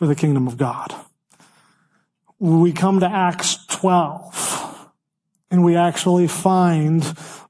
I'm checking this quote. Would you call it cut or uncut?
uncut